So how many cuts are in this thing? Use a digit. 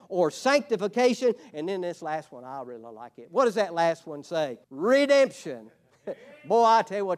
1